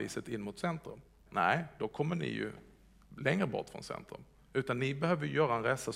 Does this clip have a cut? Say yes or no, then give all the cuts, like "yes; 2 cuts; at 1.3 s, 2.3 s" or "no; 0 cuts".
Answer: yes; 1 cut; at 1.3 s